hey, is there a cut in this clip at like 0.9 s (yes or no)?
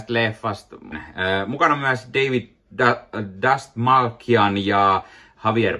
yes